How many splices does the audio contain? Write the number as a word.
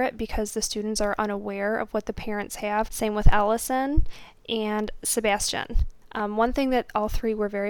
one